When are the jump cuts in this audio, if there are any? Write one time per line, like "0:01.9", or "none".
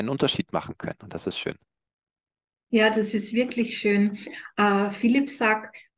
none